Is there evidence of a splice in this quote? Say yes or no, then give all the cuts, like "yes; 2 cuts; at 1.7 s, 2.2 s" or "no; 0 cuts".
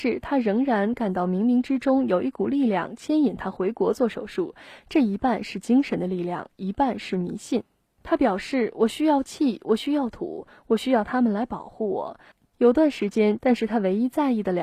yes; 2 cuts; at 12.3 s, 13.4 s